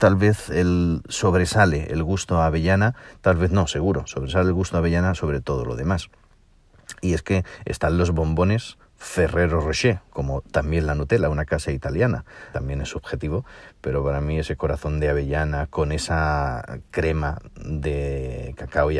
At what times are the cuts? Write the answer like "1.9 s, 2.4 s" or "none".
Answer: 10.1 s, 12.5 s